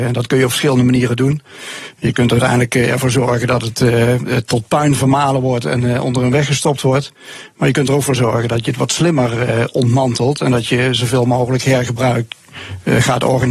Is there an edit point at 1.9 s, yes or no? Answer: no